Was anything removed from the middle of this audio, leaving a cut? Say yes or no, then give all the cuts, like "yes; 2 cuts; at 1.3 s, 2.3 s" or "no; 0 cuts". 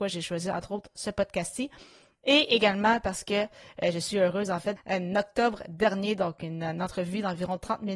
yes; 1 cut; at 4.8 s